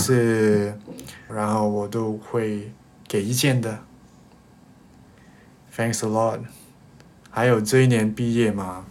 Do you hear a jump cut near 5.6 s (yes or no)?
no